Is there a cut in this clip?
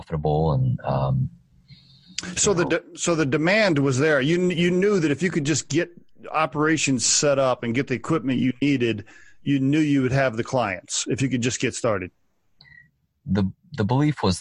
no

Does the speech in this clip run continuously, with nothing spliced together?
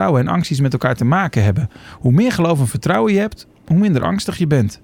yes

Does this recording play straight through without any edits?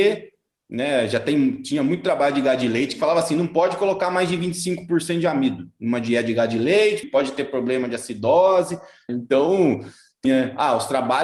no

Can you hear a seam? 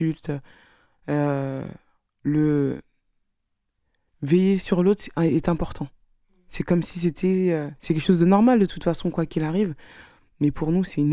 no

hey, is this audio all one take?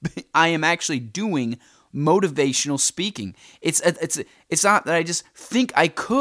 yes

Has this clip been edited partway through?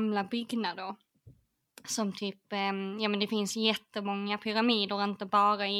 no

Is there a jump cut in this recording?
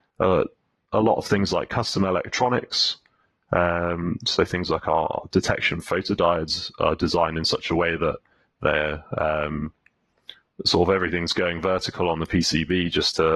no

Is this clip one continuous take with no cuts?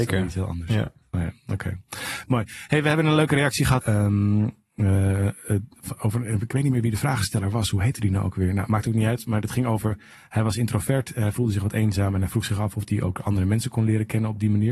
no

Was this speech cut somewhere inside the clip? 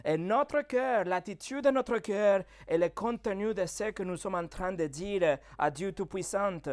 no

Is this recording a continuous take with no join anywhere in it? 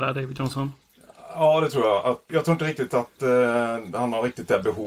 no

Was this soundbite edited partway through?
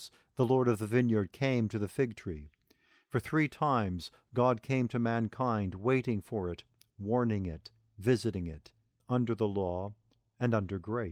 yes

